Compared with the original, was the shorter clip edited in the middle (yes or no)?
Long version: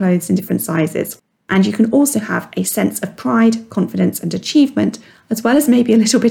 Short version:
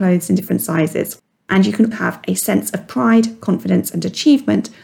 yes